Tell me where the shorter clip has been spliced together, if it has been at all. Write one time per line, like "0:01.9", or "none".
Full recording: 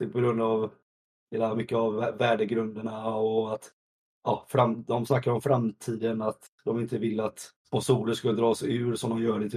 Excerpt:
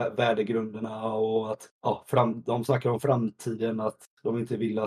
0:01.7

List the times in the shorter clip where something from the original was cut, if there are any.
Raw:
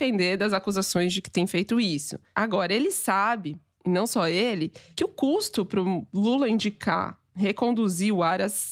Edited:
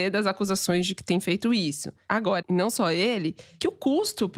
0:02.4

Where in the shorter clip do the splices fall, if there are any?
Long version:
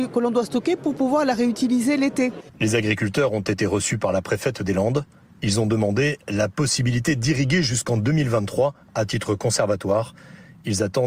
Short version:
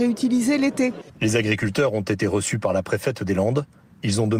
none

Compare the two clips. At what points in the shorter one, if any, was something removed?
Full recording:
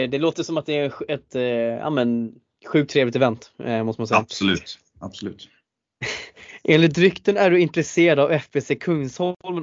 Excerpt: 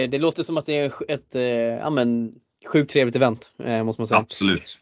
none

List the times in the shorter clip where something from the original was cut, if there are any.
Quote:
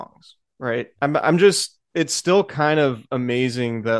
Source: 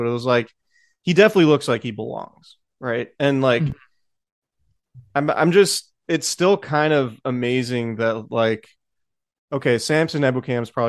0:01.0

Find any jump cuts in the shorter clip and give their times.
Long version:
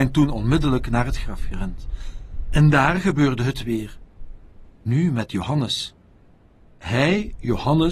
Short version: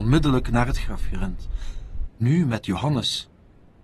0:02.1

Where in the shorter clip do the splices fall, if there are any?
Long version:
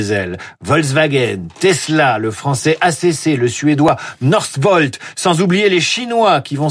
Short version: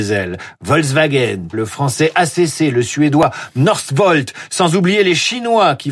0:01.5

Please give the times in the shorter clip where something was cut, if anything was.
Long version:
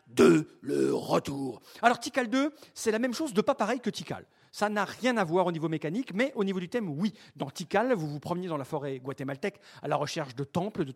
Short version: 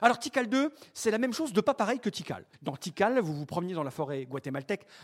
0:02.5

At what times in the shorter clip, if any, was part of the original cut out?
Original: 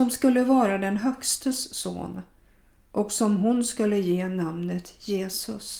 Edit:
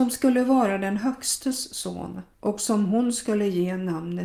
0:02.3

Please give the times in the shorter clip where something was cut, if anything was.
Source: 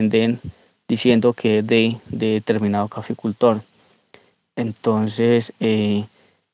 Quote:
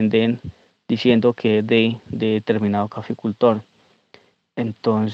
none

